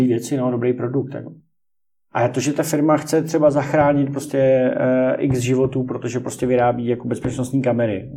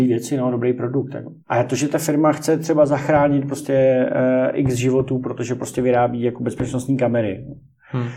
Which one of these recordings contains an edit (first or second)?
second